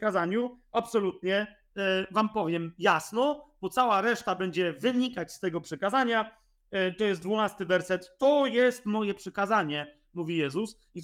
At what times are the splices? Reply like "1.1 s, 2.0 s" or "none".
none